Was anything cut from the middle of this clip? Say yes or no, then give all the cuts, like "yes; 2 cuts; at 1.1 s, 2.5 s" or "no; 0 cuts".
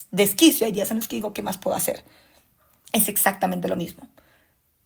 no; 0 cuts